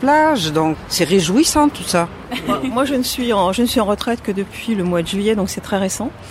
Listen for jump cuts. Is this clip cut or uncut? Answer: uncut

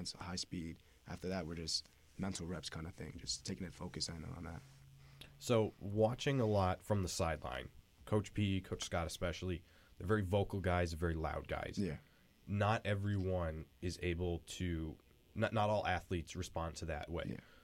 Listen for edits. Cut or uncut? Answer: uncut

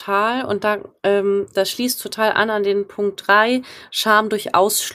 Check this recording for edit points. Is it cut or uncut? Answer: uncut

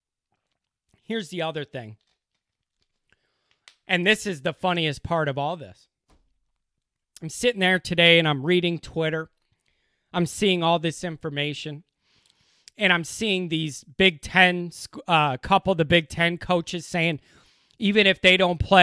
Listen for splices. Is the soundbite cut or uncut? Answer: uncut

